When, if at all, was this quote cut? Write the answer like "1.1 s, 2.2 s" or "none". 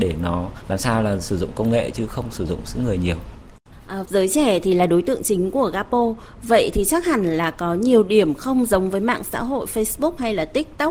4.0 s